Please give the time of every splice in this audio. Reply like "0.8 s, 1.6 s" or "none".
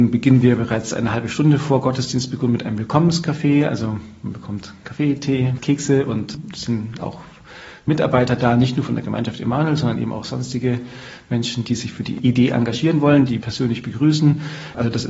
13.3 s